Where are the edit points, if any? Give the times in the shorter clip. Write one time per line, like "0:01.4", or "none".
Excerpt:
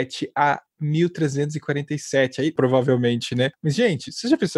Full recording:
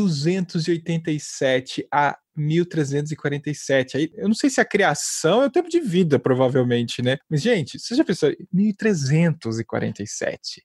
0:02.6